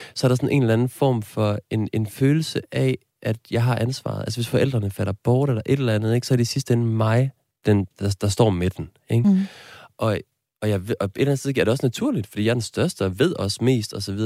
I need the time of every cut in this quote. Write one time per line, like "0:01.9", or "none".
none